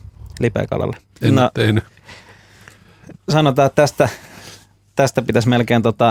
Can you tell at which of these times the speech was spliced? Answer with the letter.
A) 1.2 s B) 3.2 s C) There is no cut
A